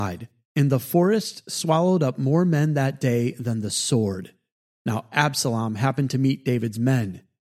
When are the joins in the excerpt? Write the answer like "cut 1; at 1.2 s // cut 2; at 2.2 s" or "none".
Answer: none